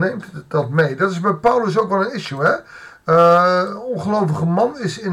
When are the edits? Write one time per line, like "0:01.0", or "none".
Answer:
none